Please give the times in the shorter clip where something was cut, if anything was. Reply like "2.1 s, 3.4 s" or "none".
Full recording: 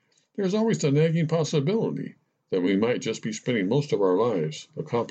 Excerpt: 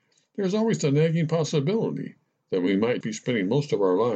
3.0 s